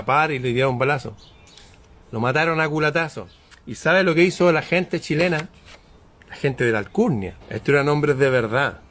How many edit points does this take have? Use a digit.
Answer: 1